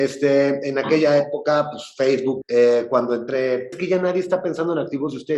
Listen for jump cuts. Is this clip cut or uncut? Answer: cut